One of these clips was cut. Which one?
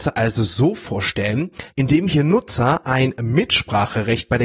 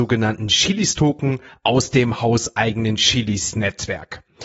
first; 1 cut; at 1.7 s

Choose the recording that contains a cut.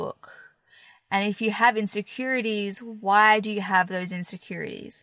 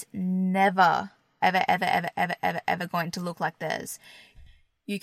second; 1 cut; at 1.4 s

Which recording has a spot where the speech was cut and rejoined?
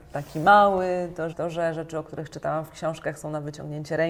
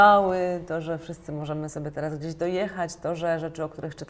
first; 1 cut; at 1.3 s

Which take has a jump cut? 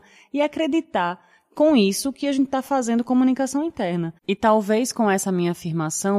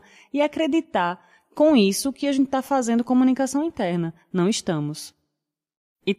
first; 1 cut; at 4.2 s

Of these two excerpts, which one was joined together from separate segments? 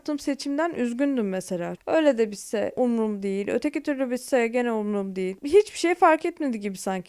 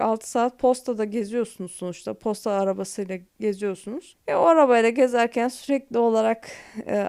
first; 1 cut; at 1.8 s

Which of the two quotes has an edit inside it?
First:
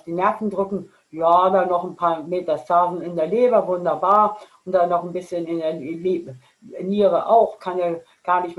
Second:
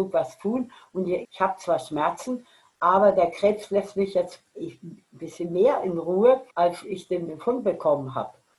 second; 2 cuts; at 1.2 s, 6.5 s

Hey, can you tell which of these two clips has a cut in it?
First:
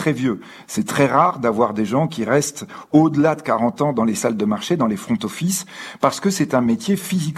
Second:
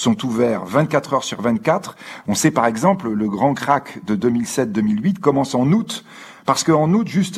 second; 1 cut; at 2.2 s

